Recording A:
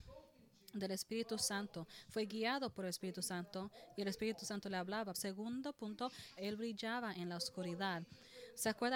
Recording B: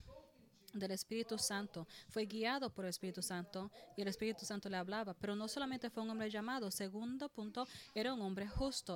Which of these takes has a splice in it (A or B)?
A